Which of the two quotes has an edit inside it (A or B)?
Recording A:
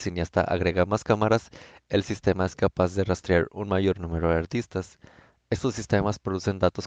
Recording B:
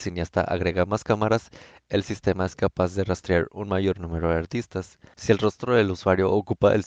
B